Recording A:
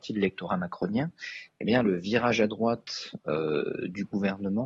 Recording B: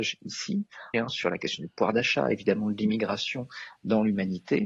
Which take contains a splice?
B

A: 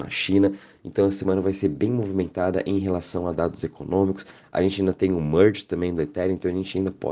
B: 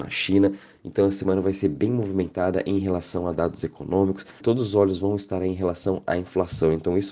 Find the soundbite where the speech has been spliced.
B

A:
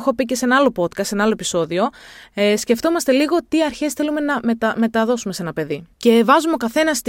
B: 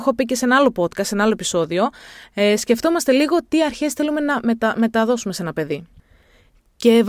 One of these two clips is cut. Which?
A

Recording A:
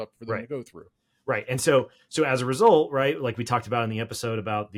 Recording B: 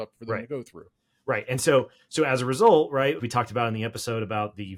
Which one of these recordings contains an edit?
B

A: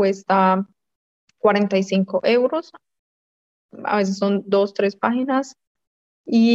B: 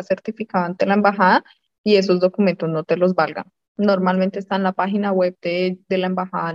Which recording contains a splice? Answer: B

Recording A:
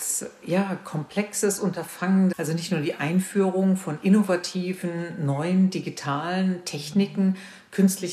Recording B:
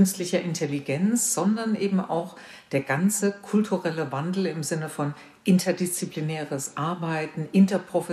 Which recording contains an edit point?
A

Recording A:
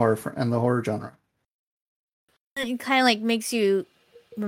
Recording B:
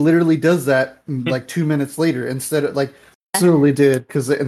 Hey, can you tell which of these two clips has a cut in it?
B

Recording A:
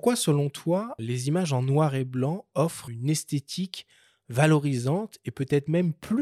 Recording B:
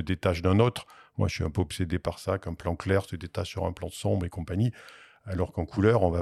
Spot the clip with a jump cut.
A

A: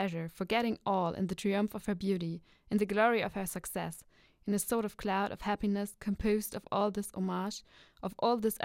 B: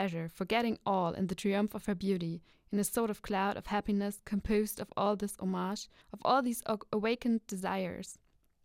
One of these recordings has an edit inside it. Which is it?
B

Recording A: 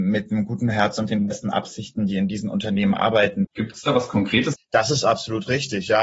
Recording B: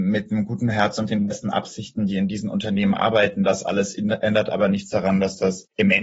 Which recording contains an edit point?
A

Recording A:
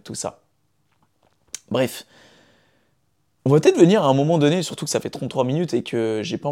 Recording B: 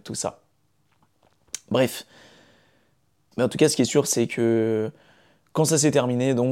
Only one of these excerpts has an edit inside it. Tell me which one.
B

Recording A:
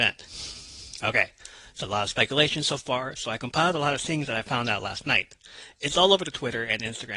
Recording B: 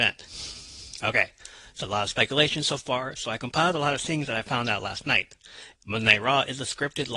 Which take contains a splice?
B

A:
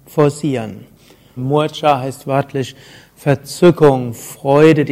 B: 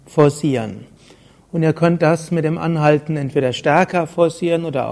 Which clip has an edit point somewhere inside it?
A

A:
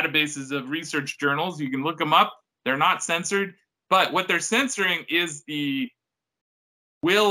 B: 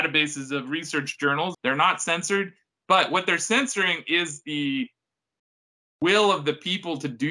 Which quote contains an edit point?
B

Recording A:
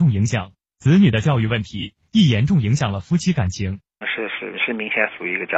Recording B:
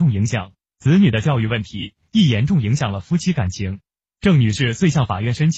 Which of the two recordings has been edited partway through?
A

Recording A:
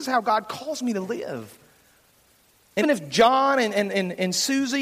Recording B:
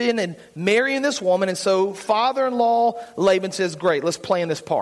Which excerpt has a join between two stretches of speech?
A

